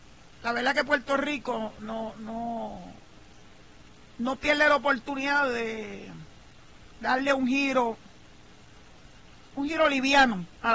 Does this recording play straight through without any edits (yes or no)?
yes